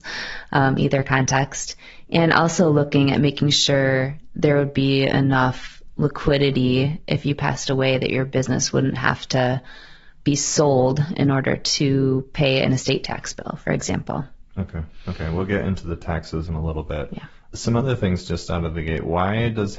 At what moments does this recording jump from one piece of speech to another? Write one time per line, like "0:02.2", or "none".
0:16.5